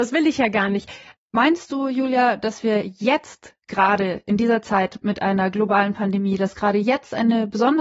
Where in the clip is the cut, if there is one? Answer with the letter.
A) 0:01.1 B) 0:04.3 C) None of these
A